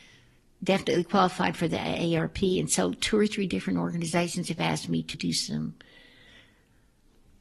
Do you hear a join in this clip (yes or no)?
yes